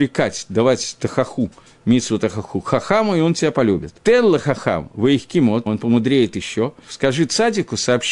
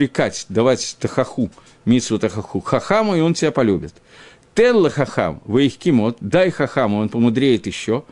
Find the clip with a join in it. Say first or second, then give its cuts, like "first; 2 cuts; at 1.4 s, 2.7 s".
first; 3 cuts; at 4.0 s, 5.7 s, 6.9 s